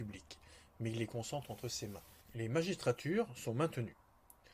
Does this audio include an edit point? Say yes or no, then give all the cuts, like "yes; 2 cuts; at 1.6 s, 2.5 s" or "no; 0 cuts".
yes; 1 cut; at 2.2 s